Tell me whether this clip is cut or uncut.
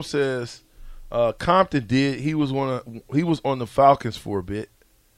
uncut